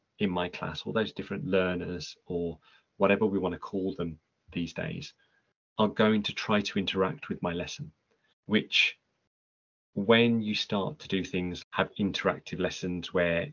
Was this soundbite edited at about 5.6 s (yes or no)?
no